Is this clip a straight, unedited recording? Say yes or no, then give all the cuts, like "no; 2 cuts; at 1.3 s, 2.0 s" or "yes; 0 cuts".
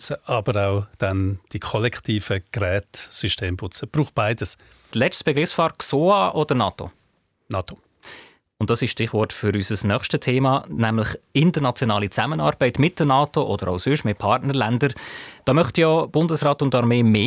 no; 1 cut; at 4.9 s